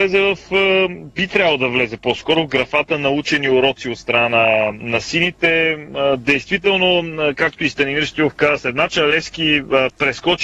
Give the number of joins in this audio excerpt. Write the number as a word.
zero